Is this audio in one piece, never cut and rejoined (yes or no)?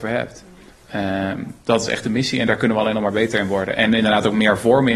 yes